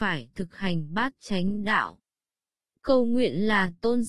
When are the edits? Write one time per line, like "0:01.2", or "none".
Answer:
0:02.7